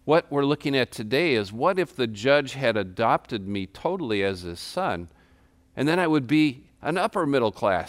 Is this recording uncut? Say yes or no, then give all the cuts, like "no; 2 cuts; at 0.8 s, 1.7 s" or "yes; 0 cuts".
yes; 0 cuts